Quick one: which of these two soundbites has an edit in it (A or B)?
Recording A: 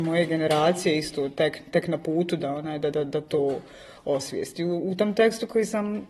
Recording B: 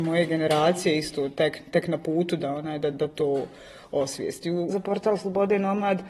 B